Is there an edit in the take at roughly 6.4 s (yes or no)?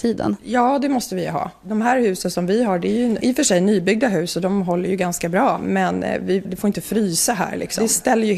yes